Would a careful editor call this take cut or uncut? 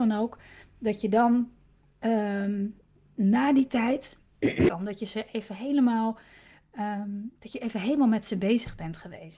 cut